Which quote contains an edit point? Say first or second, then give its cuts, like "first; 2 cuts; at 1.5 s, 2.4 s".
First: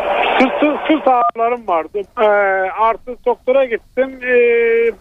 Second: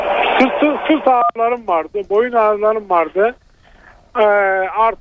first; 1 cut; at 2.1 s